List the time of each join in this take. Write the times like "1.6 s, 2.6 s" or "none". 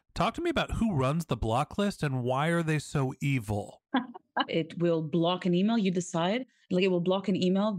4.5 s